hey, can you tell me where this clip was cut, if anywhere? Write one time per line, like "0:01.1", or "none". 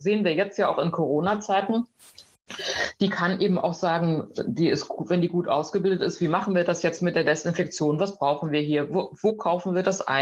none